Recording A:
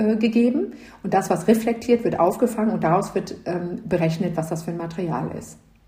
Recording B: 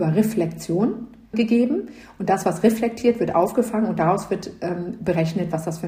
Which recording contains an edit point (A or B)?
B